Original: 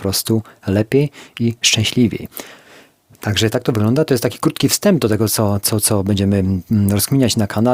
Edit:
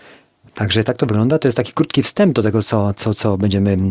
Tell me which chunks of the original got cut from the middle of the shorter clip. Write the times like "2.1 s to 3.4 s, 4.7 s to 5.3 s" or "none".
none